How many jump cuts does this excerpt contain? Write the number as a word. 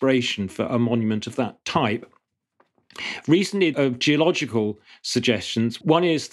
one